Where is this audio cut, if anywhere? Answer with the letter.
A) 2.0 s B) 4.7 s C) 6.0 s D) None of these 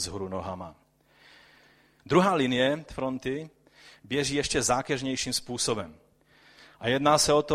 A